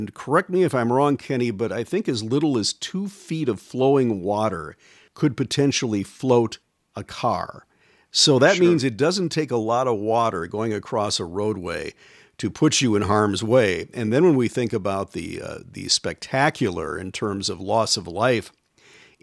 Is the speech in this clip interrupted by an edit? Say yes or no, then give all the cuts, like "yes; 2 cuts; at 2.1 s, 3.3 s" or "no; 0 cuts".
no; 0 cuts